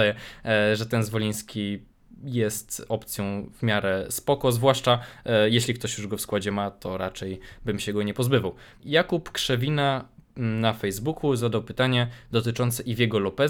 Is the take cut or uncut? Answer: uncut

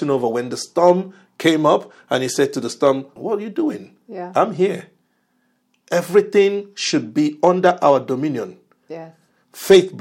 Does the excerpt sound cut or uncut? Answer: cut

